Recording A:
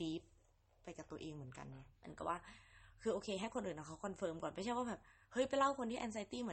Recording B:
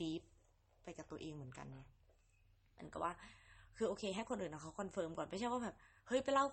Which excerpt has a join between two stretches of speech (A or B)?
A